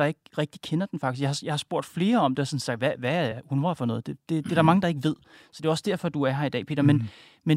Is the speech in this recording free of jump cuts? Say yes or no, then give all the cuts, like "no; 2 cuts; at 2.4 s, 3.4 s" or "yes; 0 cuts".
yes; 0 cuts